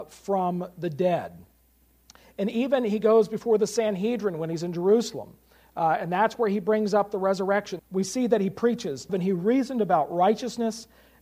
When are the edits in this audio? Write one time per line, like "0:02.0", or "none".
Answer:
0:07.8
0:09.1